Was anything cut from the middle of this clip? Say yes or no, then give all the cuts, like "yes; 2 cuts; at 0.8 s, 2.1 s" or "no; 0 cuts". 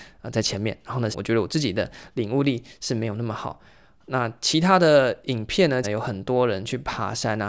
yes; 2 cuts; at 1.1 s, 5.8 s